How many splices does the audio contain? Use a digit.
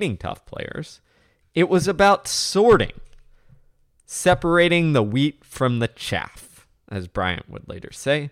0